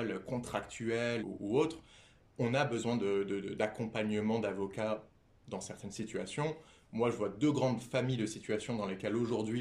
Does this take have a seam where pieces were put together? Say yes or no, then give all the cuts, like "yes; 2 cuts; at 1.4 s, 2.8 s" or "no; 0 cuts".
yes; 1 cut; at 1.2 s